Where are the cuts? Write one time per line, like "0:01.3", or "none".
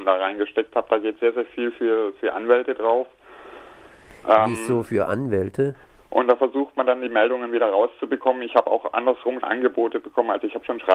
0:06.0
0:09.4

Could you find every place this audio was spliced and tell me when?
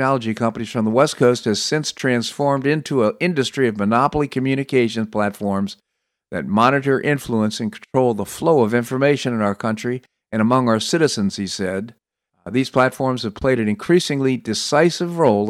0:12.3

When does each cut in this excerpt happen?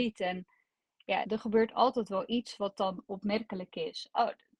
0:01.2

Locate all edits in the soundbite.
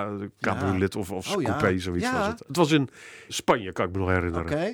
0:03.3

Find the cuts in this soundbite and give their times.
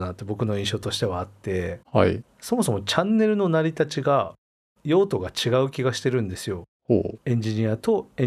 0:02.3

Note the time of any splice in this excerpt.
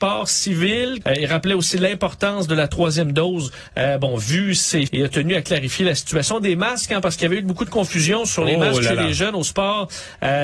0:01.0
0:04.9

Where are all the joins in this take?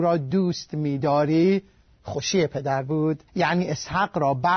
0:03.3

